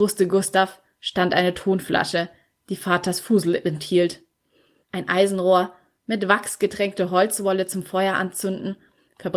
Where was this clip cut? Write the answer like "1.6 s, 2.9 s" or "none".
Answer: 4.8 s